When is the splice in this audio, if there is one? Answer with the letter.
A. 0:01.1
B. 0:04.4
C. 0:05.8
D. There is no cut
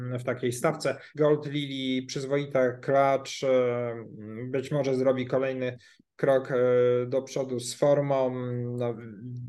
A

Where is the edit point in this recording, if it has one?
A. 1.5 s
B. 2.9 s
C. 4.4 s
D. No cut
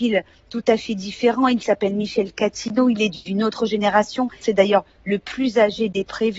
C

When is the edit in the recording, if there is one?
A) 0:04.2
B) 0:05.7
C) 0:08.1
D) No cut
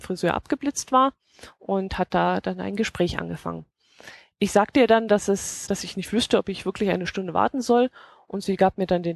B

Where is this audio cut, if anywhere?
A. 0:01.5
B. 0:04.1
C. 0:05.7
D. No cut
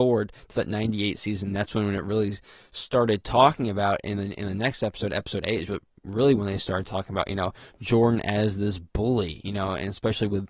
D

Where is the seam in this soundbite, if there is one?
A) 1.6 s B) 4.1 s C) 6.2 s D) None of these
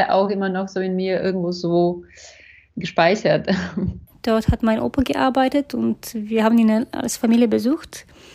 B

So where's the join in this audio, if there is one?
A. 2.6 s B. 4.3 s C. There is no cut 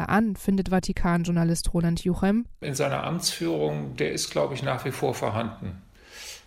A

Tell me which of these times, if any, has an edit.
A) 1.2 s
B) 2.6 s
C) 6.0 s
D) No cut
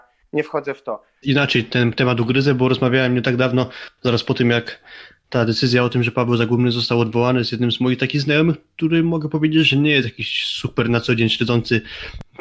A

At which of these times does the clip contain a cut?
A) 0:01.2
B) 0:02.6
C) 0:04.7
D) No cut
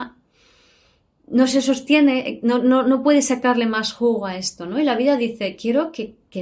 D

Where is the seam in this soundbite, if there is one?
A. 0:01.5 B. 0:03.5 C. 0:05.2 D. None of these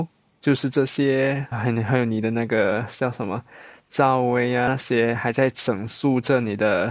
A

